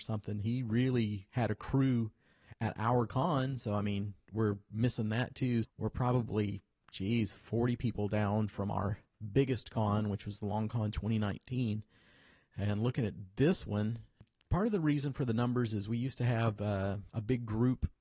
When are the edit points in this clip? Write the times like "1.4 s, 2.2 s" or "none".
5.6 s